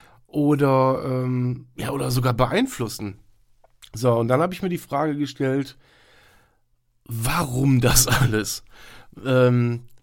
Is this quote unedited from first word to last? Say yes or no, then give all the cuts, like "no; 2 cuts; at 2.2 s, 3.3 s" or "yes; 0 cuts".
yes; 0 cuts